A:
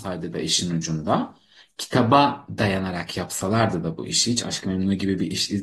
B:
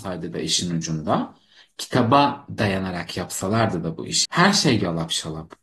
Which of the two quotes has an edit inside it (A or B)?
B